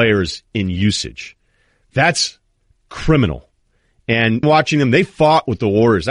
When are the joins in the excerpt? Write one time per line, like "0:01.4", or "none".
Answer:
0:04.4